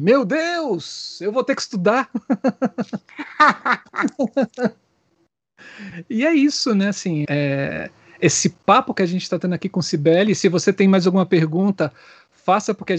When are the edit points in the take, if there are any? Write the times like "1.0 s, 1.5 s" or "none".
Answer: 7.2 s